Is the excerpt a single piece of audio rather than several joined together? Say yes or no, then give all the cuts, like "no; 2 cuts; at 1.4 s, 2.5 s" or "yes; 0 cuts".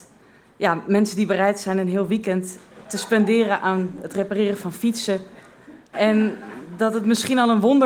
no; 1 cut; at 5.9 s